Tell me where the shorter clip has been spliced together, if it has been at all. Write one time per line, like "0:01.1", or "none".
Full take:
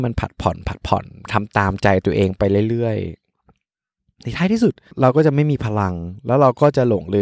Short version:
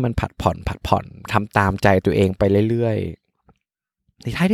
none